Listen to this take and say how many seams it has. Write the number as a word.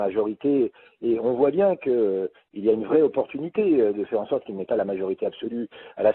zero